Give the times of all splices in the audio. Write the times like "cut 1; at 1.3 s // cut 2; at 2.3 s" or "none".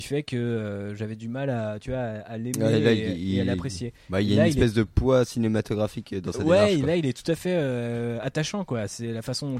none